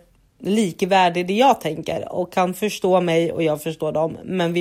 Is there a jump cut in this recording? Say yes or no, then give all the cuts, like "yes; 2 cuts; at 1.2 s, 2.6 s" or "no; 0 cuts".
no; 0 cuts